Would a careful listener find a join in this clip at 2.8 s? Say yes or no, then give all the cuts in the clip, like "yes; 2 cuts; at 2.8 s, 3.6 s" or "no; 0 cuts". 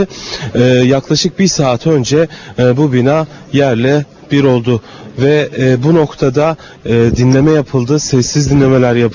no; 0 cuts